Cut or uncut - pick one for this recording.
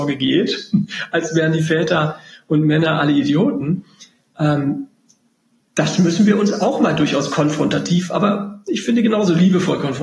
uncut